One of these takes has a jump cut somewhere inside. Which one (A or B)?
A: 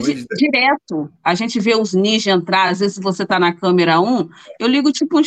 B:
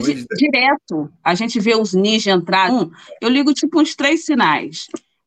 B